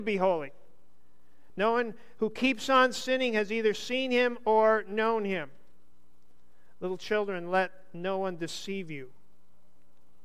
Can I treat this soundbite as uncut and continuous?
no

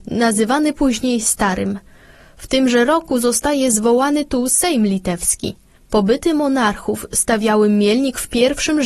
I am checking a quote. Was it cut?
no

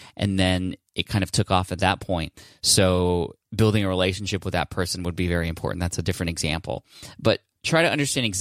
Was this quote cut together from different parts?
no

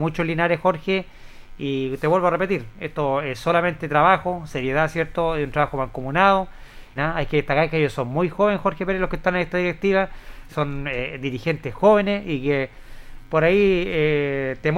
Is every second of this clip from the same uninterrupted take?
no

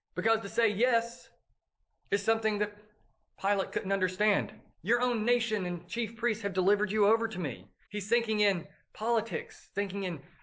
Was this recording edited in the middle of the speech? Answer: yes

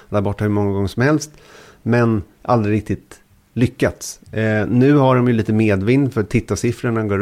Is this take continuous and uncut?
yes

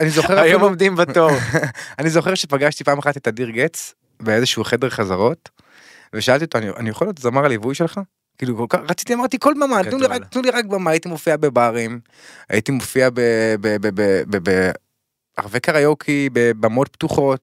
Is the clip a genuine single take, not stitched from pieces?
yes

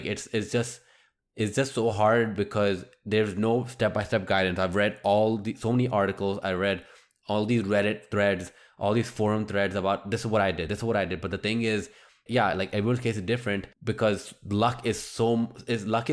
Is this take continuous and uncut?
no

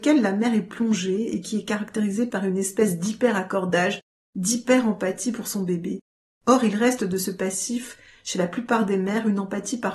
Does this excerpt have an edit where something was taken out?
yes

